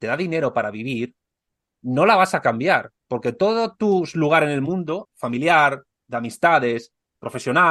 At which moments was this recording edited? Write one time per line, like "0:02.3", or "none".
0:05.0

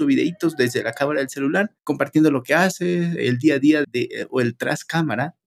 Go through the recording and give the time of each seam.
0:01.8
0:03.8

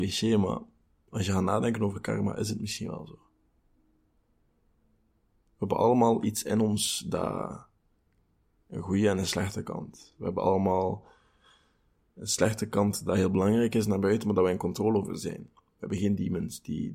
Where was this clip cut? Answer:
none

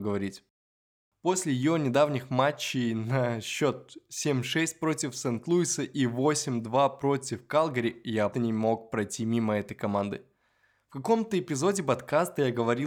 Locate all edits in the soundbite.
0:08.3

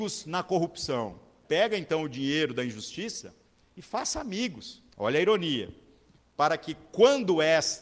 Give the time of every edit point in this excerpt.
0:01.4
0:04.9

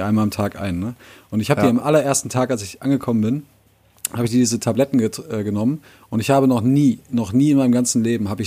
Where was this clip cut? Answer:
none

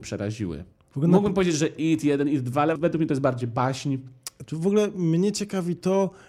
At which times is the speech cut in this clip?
0:02.8
0:04.5

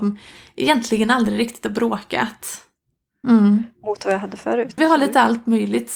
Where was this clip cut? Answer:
0:03.2
0:04.8

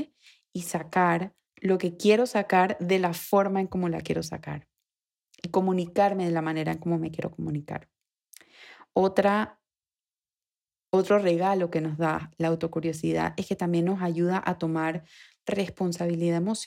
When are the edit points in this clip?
0:01.4

